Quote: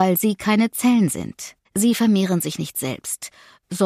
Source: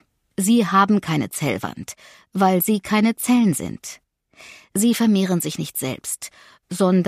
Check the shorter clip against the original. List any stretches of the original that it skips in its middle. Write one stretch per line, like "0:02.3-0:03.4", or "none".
0:04.1-0:04.6